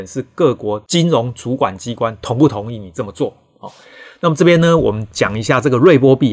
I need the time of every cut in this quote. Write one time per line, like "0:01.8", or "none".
none